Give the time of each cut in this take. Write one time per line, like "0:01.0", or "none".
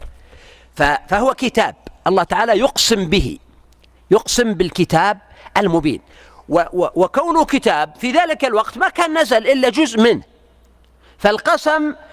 none